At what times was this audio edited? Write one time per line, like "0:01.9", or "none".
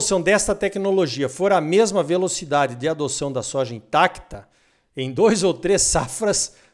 none